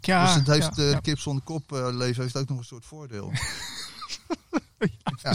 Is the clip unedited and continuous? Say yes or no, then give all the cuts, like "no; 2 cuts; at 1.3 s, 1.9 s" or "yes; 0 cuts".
yes; 0 cuts